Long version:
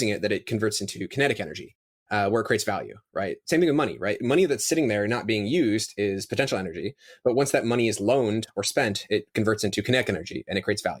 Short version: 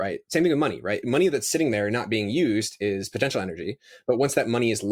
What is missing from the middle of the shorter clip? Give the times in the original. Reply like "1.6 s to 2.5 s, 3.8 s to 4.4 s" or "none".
none